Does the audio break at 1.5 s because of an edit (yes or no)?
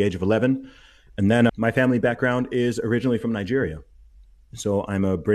yes